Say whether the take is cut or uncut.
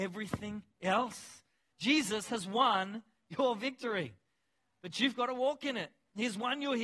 uncut